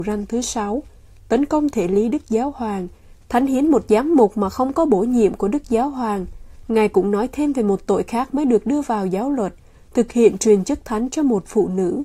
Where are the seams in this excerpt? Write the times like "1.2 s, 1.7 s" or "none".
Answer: none